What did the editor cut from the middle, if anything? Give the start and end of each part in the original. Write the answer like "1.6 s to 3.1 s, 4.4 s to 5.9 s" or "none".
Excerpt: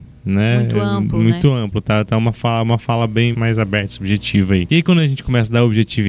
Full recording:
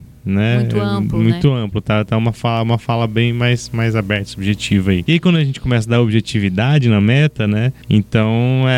3.3 s to 3.7 s